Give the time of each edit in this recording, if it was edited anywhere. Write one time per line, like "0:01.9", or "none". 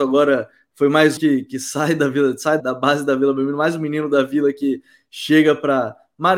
0:01.2
0:02.6